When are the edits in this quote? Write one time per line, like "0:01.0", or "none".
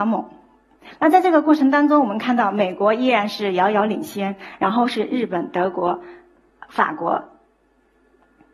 none

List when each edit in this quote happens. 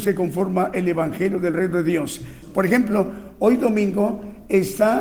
0:02.4

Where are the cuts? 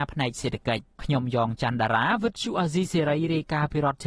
0:00.9

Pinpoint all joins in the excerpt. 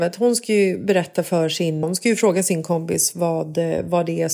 0:01.8

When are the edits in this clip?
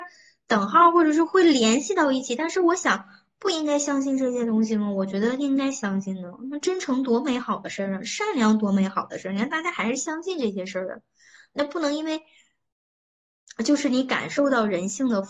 none

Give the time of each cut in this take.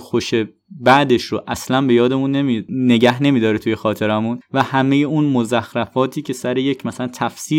0:02.7

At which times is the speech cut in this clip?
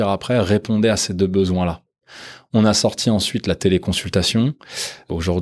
none

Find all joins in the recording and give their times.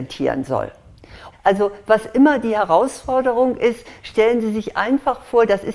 0:01.3

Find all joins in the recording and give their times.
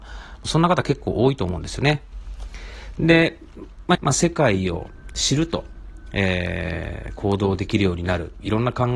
0:02.9
0:03.9

